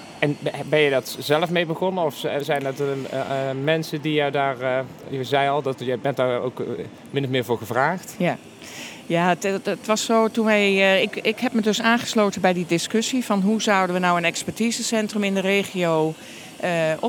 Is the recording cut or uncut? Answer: uncut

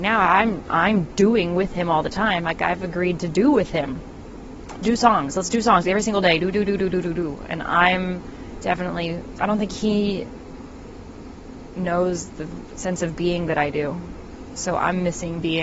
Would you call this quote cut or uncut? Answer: uncut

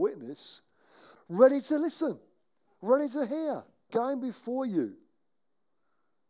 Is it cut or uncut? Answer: cut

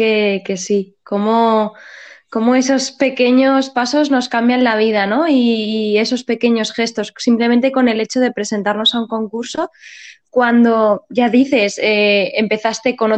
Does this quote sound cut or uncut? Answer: uncut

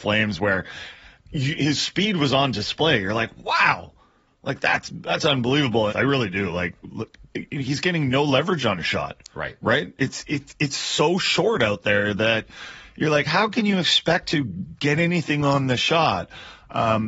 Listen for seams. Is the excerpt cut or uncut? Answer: cut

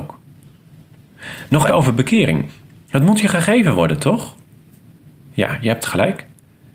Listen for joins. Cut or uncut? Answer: cut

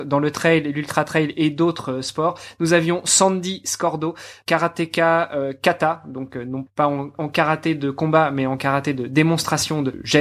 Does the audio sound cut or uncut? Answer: uncut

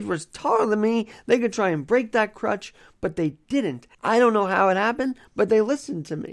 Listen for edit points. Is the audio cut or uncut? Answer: cut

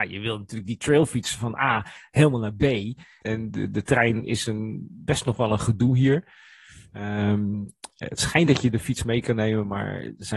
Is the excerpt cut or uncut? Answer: cut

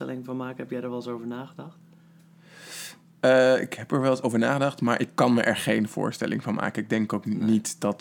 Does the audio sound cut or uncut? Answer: cut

